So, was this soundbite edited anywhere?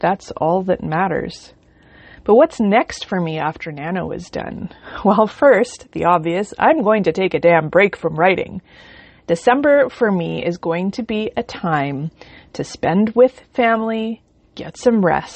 no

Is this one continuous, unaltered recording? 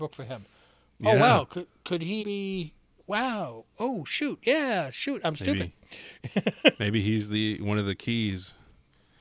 no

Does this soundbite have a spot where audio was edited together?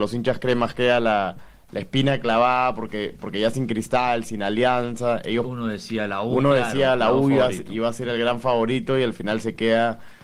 no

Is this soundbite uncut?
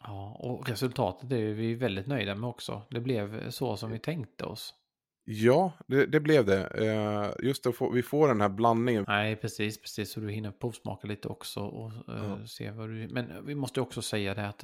no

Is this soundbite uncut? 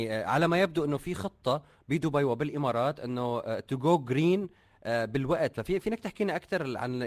yes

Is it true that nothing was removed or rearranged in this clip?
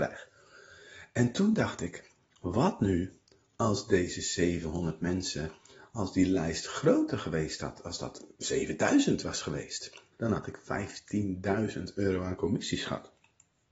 no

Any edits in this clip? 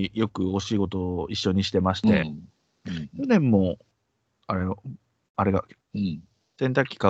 yes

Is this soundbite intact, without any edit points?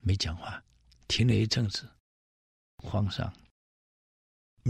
yes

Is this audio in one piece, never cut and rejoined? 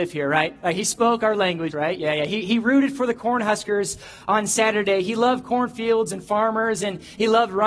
no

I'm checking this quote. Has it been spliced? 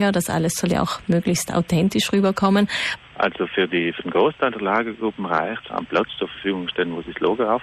yes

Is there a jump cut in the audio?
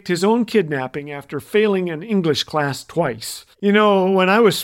yes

